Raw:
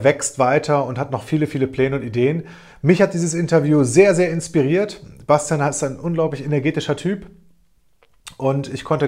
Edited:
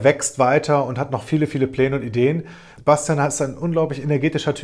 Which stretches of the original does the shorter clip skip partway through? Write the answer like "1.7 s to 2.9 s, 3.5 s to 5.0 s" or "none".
2.8 s to 5.2 s